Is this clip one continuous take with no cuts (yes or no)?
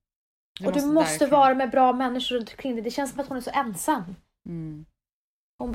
yes